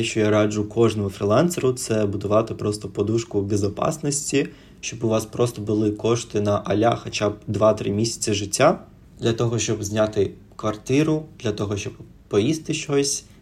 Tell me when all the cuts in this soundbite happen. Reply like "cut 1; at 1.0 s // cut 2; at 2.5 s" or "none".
none